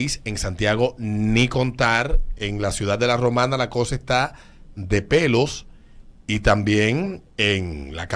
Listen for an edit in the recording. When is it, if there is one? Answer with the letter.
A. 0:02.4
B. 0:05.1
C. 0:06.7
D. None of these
D